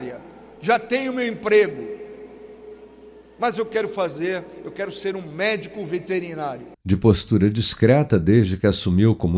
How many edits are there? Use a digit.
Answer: 1